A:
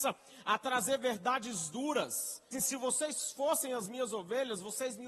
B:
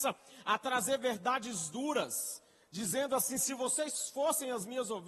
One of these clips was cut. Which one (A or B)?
A